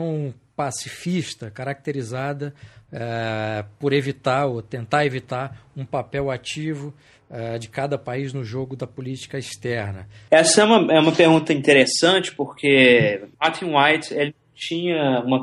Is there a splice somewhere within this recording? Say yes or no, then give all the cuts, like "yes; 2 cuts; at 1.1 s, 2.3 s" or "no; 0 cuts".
yes; 2 cuts; at 10.3 s, 13.3 s